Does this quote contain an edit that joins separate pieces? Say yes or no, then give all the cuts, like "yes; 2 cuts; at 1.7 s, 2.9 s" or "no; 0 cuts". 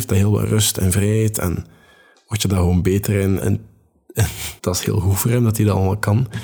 yes; 2 cuts; at 3.4 s, 4.6 s